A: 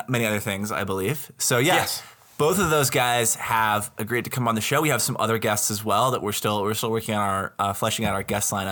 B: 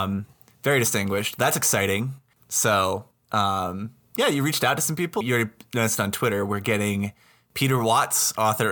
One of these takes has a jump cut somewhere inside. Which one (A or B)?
B